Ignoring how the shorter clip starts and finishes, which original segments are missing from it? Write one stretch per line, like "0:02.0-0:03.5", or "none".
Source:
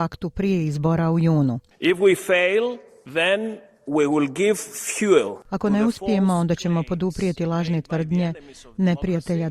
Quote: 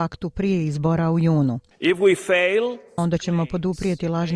0:03.0-0:06.4